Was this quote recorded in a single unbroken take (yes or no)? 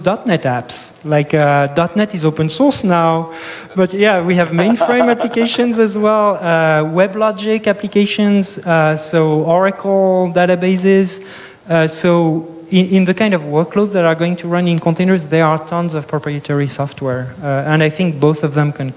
yes